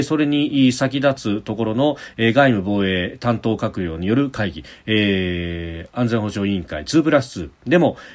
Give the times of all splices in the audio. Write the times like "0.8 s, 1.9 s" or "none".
2.1 s